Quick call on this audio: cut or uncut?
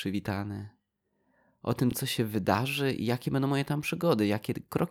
uncut